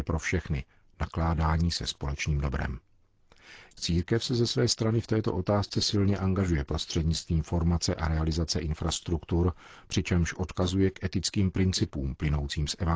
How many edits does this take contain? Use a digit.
1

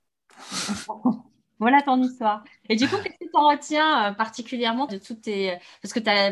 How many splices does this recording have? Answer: 1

